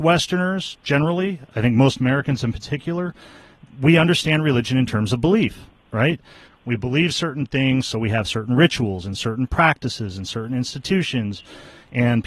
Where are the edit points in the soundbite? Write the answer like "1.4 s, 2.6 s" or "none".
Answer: 6.4 s